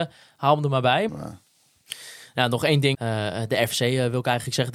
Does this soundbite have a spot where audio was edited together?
yes; 2 cuts; at 1.1 s, 2.9 s

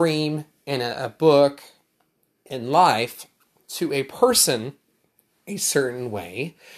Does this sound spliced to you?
no; 0 cuts

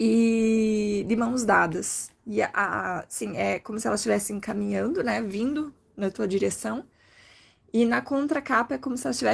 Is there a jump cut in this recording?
no; 0 cuts

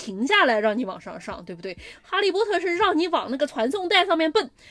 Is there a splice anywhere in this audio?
no; 0 cuts

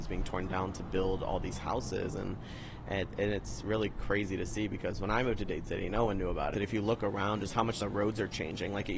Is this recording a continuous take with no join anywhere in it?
no; 2 cuts; at 6.5 s, 7.8 s

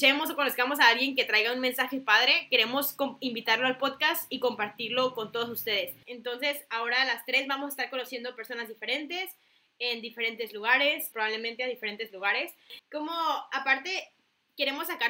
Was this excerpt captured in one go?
no; 3 cuts; at 6.0 s, 11.1 s, 12.8 s

